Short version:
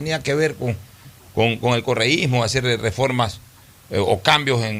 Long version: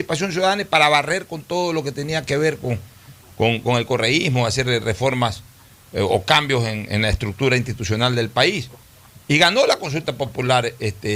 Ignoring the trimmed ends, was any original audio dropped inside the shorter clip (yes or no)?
no